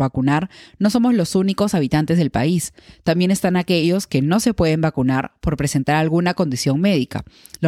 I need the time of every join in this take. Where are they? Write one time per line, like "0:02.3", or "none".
none